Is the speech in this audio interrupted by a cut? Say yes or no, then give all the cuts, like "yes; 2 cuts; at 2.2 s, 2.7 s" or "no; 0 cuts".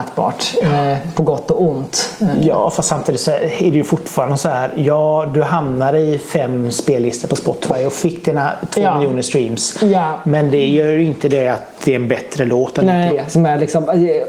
yes; 1 cut; at 13.1 s